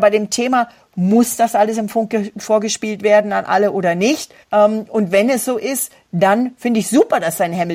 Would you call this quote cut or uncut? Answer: cut